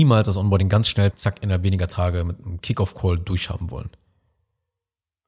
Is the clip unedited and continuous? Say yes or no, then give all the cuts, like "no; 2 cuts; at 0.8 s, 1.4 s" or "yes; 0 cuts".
no; 1 cut; at 1.1 s